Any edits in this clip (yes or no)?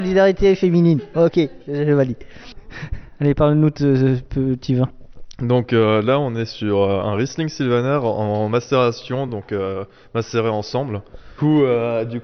no